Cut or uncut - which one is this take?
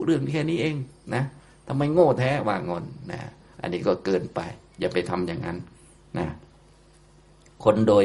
uncut